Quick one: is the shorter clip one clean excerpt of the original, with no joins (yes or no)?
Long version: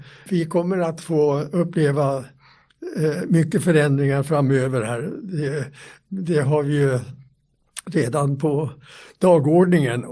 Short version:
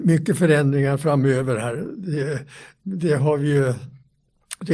yes